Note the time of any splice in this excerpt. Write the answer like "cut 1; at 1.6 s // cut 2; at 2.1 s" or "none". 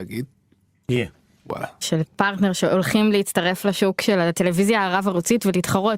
cut 1; at 1.8 s